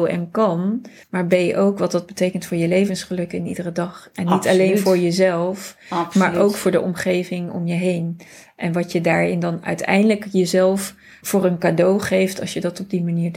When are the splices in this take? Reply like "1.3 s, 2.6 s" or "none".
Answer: 1.0 s, 11.2 s